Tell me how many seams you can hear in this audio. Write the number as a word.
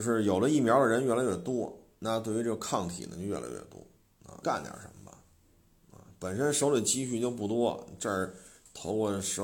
one